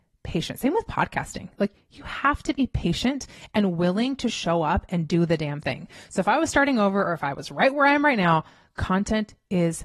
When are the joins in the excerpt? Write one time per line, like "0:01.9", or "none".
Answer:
none